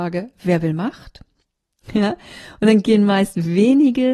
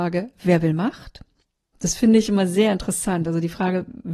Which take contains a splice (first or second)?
second